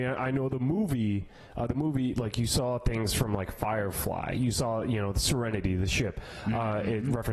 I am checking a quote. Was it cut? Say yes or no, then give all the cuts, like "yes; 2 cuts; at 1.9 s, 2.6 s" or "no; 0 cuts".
no; 0 cuts